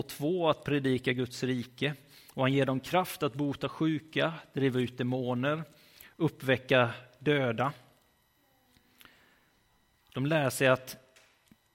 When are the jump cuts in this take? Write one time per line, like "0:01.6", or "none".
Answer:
0:10.0